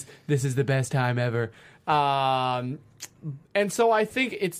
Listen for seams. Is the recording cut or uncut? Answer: cut